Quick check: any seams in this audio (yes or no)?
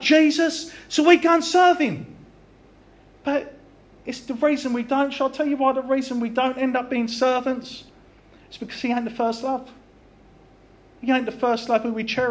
no